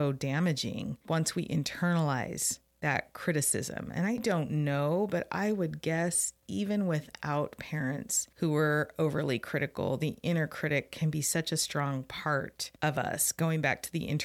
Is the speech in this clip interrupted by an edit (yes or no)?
no